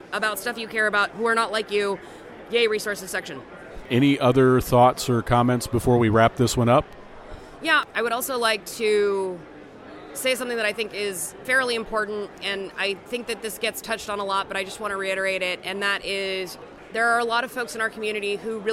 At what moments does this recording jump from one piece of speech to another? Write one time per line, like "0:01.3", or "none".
none